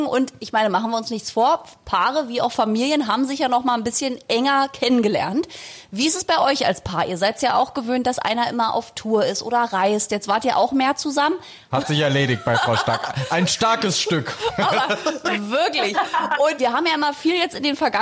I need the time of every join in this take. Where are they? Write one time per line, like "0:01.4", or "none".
0:11.7
0:16.6

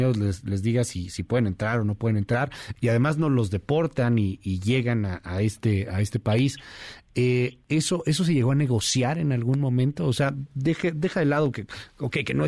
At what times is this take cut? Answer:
none

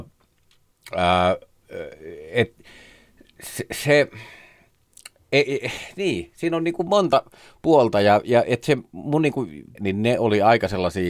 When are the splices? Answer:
0:09.8

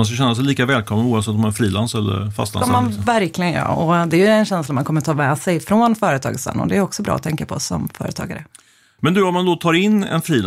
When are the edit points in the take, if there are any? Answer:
0:09.0

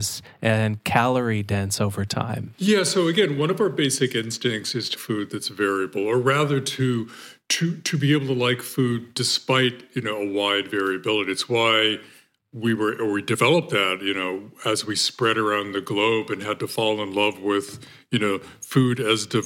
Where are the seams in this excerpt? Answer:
0:05.0

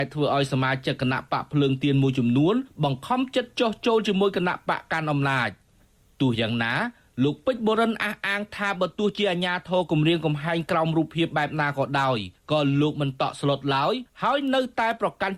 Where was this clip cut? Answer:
none

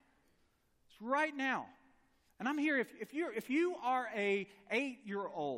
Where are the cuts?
0:02.3

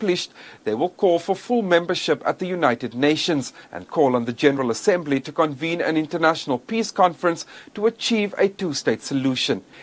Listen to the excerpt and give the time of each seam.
0:03.8

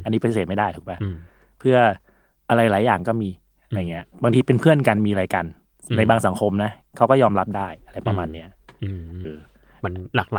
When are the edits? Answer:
0:09.2

